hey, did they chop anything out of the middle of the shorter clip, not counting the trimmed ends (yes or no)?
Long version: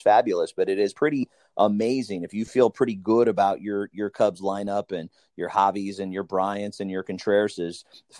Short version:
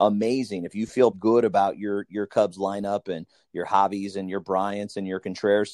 yes